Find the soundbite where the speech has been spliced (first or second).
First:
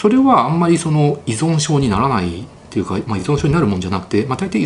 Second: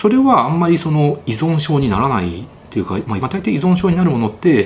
second